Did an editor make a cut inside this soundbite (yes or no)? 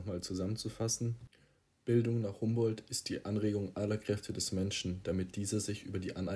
no